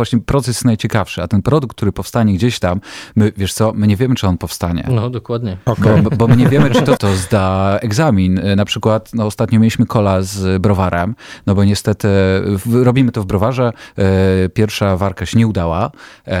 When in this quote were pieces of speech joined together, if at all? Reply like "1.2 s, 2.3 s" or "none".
7.0 s